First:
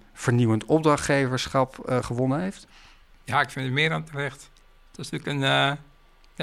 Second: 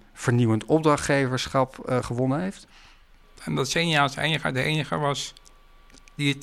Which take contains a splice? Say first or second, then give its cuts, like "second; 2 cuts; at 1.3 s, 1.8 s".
second; 1 cut; at 3.2 s